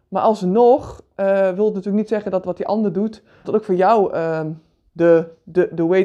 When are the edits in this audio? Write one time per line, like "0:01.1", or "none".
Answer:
0:03.4